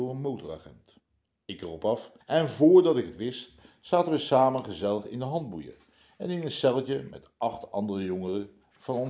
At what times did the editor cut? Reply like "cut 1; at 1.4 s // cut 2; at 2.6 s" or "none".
cut 1; at 2.2 s

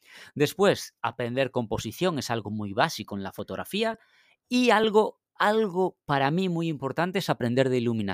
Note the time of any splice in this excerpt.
none

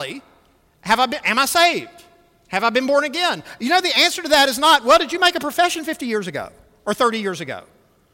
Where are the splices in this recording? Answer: none

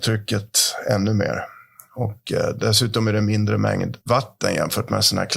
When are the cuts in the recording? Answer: cut 1; at 4.0 s

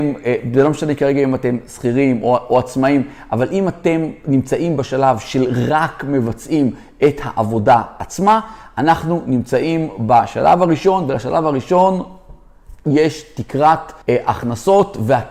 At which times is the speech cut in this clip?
cut 1; at 14.0 s

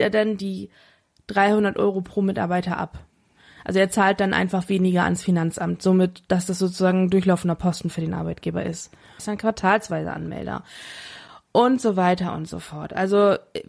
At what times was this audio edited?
cut 1; at 9.2 s

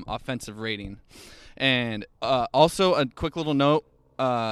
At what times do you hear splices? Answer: cut 1; at 2.2 s

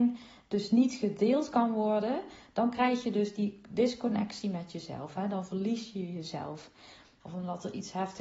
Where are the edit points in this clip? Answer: cut 1; at 7.2 s

